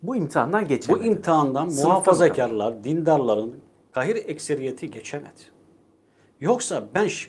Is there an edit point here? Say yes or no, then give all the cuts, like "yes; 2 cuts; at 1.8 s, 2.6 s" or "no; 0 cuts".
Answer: no; 0 cuts